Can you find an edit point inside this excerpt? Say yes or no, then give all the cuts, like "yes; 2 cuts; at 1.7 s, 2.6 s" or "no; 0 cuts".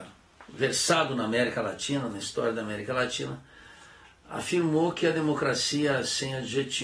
no; 0 cuts